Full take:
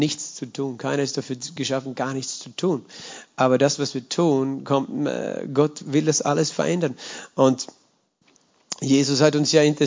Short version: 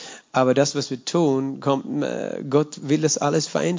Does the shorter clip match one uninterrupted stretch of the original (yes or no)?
yes